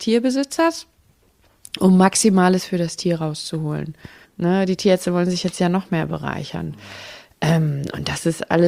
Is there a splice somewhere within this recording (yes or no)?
yes